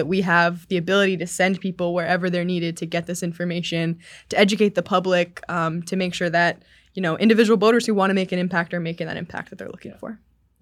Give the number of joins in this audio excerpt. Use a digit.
0